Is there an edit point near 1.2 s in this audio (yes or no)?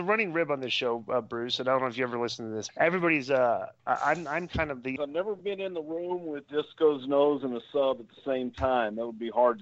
no